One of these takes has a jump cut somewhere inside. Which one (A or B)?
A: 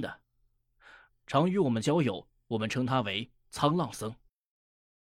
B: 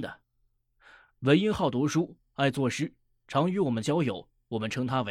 A